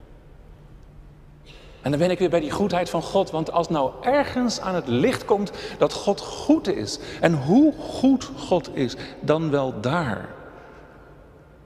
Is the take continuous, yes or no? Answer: yes